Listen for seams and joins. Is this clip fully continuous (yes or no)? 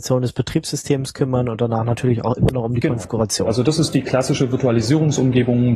yes